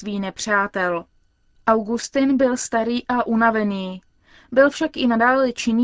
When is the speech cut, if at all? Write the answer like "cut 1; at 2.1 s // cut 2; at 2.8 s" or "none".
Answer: none